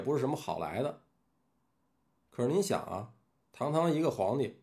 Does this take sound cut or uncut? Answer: cut